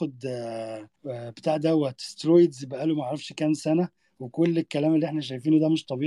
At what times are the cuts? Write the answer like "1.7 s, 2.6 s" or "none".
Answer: 1.0 s